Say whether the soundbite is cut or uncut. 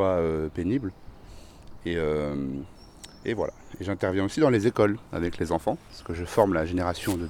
uncut